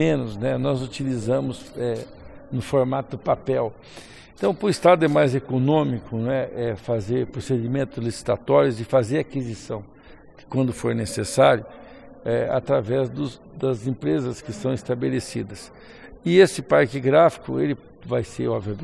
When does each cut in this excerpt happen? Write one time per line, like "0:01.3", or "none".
none